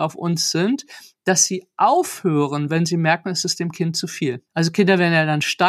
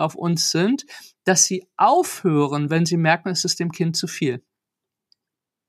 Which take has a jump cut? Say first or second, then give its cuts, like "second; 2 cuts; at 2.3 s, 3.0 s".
first; 1 cut; at 4.5 s